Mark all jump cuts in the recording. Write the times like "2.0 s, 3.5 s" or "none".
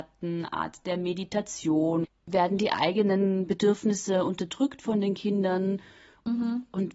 2.1 s